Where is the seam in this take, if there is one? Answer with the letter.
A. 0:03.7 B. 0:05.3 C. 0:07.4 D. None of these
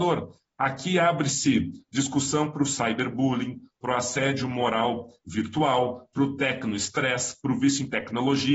D